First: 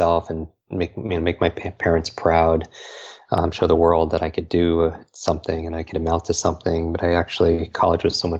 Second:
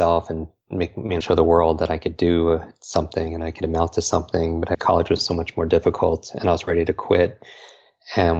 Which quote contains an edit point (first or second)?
second